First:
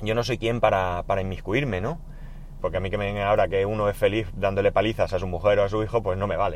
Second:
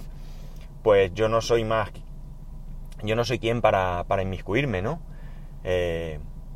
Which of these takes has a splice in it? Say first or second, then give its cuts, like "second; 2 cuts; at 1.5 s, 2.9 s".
first; 1 cut; at 2.6 s